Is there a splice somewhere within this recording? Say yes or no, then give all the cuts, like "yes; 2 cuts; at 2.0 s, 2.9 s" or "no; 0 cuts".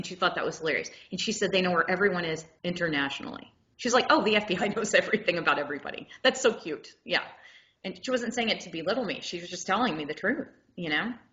no; 0 cuts